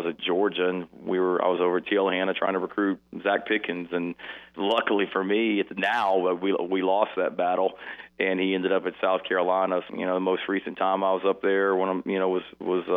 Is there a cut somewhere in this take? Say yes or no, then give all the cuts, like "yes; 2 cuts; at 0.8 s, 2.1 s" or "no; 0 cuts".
yes; 2 cuts; at 4.5 s, 9.9 s